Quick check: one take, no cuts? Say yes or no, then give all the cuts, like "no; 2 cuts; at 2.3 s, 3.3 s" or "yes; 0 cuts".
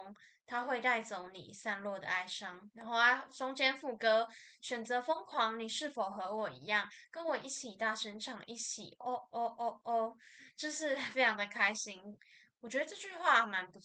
no; 2 cuts; at 9.0 s, 12.2 s